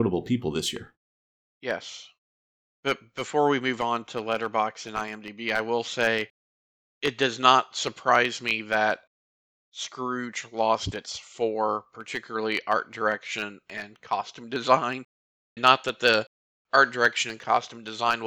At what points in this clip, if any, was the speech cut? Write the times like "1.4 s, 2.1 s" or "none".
15.6 s